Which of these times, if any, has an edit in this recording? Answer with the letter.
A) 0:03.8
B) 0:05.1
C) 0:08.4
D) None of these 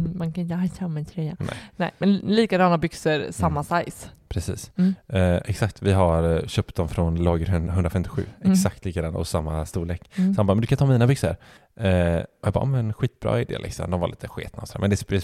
D